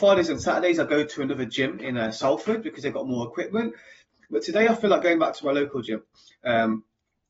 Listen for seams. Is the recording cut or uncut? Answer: uncut